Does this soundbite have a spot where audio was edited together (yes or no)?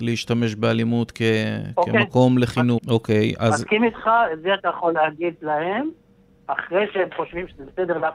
yes